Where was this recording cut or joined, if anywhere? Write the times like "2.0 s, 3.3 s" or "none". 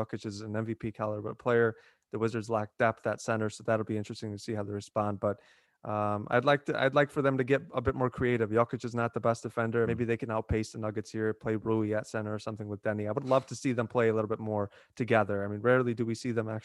9.8 s

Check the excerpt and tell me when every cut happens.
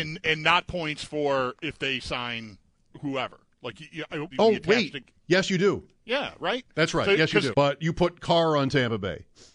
4.3 s, 7.5 s

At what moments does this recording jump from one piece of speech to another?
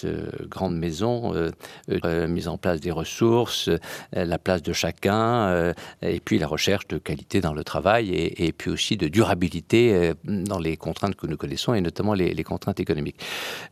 2.0 s

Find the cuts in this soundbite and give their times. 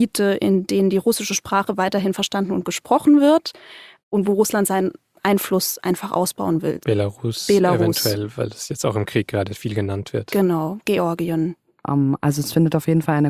6.8 s, 11.8 s

